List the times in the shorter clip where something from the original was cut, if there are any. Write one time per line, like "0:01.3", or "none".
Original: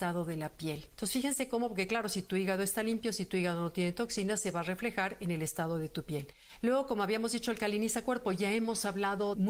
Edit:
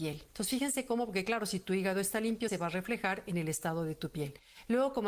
0:02.5